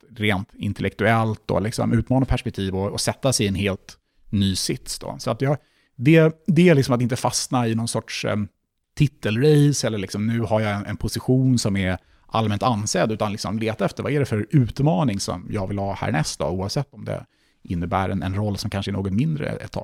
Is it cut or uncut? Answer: uncut